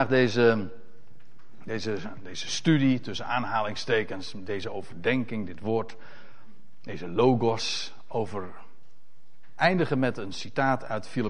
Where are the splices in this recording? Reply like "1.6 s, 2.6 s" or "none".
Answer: none